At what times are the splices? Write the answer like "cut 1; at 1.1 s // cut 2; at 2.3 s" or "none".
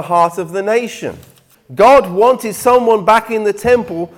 cut 1; at 1.5 s